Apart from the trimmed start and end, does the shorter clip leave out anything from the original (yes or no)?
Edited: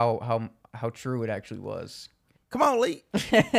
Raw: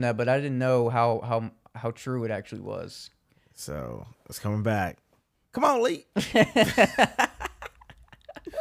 yes